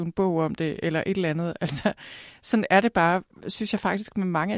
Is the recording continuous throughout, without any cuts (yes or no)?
yes